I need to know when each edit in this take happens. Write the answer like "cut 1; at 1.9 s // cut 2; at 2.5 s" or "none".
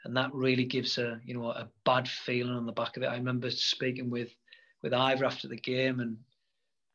none